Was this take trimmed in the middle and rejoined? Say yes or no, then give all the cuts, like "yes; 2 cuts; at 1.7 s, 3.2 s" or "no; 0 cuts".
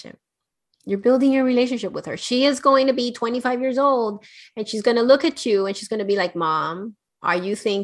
no; 0 cuts